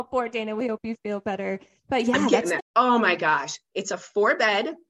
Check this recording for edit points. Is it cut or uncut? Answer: cut